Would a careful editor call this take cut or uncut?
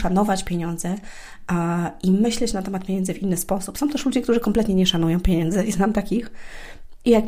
uncut